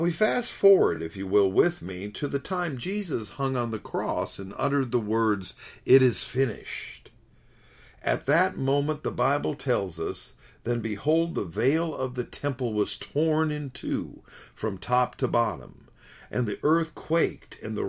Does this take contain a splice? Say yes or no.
no